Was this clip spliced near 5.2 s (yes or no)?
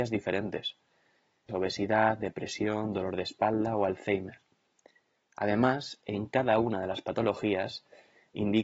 no